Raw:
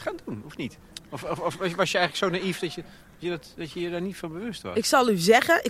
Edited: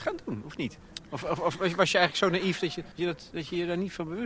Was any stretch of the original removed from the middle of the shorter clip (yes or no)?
yes